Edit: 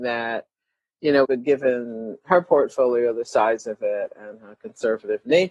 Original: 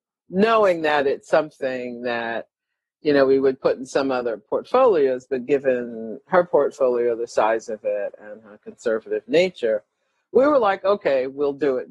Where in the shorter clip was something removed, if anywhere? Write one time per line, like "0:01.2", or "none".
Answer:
0:01.2

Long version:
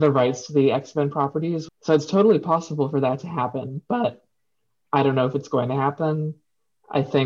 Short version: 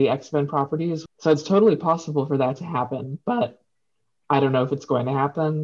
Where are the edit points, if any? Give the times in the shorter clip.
none

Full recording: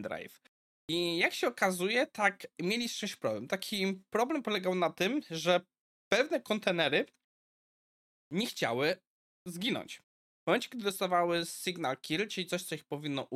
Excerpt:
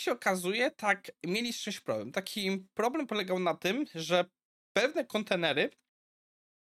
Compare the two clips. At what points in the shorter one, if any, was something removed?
none

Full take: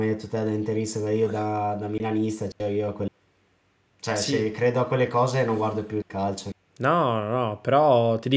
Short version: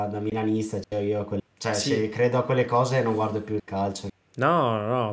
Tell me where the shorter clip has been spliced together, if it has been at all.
0:01.5

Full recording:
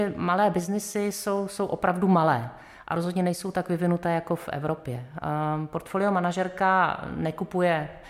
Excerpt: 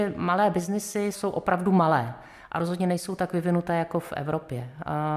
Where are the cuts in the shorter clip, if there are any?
0:01.1

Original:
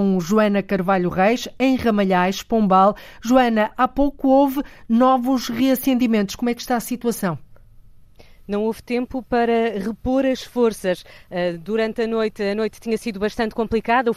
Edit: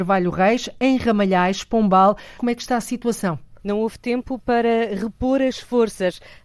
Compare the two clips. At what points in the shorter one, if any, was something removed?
0:02.4
0:03.6

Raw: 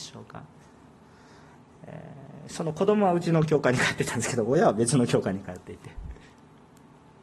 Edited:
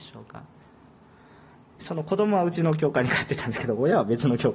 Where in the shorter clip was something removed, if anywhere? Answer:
0:01.8

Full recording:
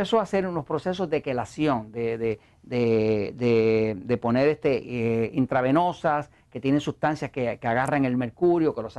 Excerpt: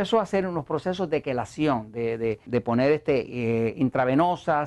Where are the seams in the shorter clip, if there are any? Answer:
0:02.5

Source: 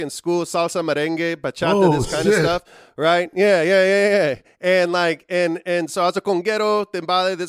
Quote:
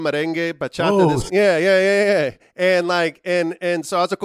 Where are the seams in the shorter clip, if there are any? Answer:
0:01.3

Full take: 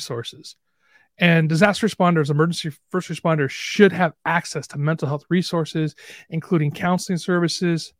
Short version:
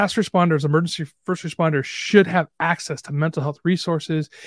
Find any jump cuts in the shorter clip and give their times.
none

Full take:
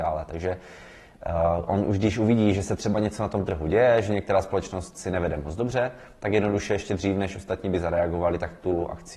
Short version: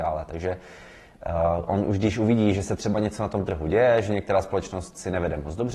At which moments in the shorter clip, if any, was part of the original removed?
none

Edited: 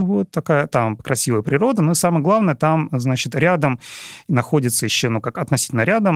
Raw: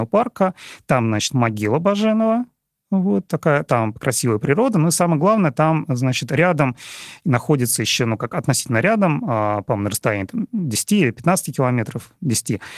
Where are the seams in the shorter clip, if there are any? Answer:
none

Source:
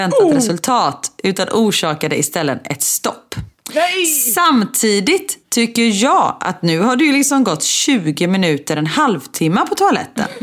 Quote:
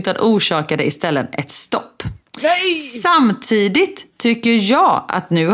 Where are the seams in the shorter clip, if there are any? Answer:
none

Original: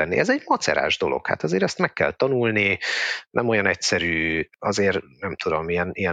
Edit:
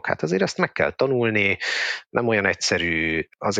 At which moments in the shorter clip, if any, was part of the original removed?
none

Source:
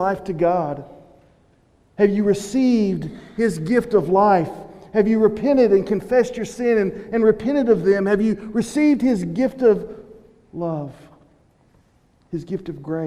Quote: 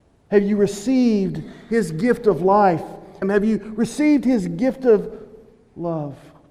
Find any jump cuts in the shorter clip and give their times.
0:03.2

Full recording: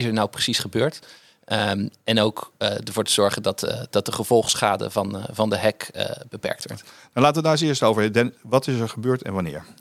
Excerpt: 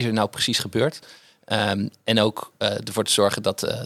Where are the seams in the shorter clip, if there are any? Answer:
none

